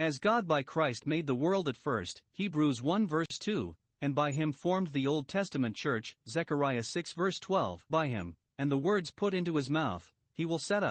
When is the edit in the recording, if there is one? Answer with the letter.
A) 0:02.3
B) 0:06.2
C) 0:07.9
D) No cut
C